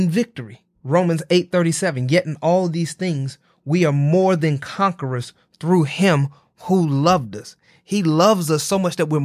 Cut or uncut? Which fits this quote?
uncut